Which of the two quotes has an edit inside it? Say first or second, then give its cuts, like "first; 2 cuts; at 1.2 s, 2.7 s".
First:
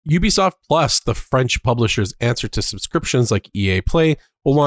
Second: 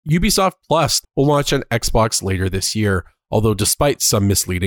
second; 1 cut; at 1.0 s